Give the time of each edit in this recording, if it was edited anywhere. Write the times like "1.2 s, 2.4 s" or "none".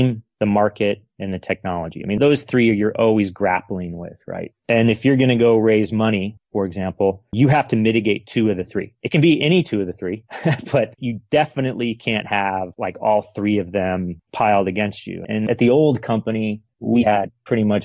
none

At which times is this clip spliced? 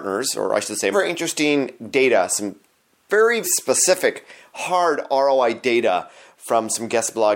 0.9 s, 3.4 s

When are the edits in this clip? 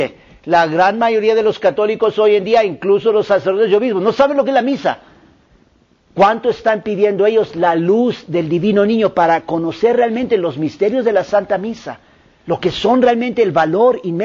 none

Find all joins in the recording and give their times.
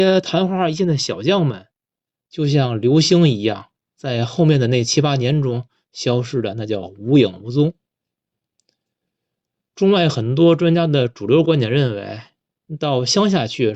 none

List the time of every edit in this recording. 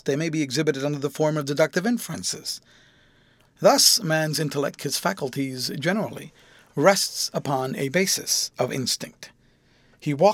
3.4 s, 4.8 s

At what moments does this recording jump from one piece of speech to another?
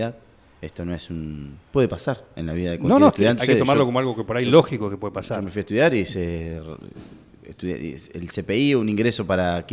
1.7 s, 3.4 s

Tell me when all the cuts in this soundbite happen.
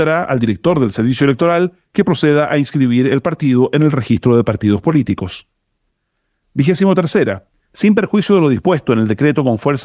7.6 s

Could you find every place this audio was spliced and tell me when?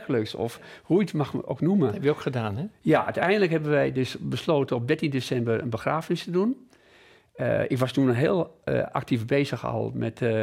none

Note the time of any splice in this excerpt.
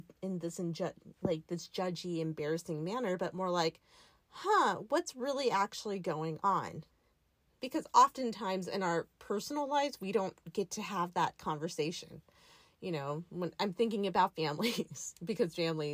7.6 s

